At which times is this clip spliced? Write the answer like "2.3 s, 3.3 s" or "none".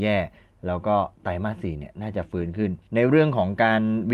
1.1 s, 2.8 s